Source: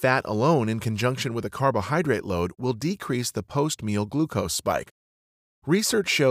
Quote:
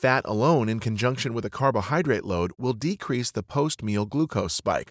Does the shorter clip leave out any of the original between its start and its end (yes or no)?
no